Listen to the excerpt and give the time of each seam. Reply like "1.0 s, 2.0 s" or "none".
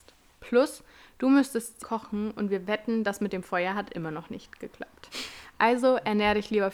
1.8 s